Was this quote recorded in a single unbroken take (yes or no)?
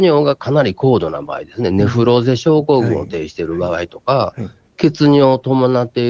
yes